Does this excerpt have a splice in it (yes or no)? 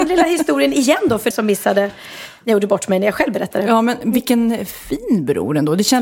yes